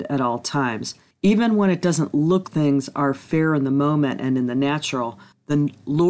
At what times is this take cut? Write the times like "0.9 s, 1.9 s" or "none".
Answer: 2.4 s